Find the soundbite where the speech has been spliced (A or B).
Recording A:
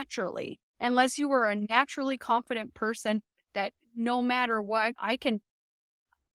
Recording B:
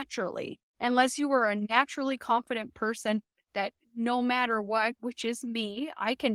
A